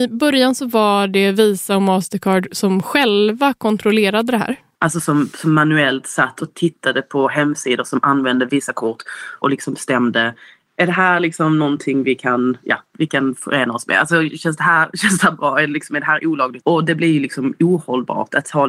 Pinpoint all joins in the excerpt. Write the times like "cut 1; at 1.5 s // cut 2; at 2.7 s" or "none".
cut 1; at 4.7 s // cut 2; at 16.6 s